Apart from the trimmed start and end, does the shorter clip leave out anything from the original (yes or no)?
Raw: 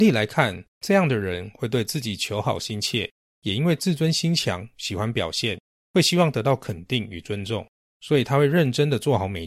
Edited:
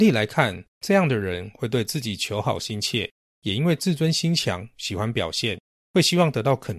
no